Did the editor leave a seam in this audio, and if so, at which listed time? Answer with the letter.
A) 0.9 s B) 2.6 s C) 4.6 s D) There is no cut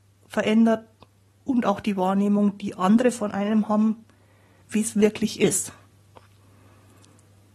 C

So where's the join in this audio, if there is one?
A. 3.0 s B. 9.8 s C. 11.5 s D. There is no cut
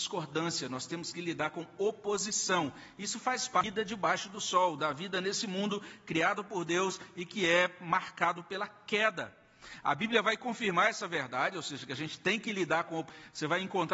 D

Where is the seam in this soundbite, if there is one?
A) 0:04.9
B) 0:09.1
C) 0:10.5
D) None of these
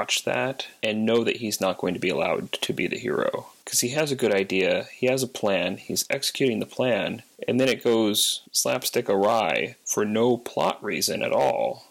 D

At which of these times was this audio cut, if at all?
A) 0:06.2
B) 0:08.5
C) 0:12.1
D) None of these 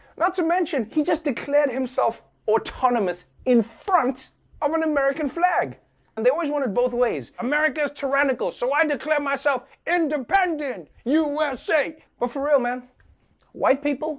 A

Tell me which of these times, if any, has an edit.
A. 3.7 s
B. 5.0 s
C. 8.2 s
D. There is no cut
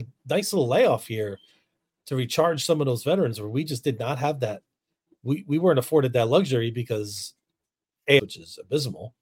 C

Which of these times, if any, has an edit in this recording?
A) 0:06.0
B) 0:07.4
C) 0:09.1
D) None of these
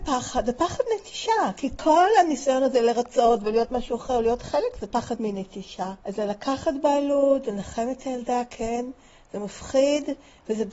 A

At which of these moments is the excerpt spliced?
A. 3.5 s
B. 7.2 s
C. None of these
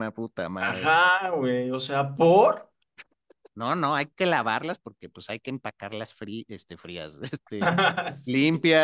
A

